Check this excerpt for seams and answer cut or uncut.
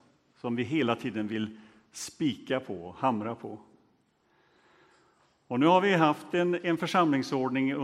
uncut